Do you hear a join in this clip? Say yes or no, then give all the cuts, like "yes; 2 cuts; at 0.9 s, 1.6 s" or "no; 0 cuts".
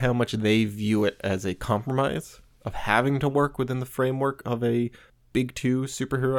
no; 0 cuts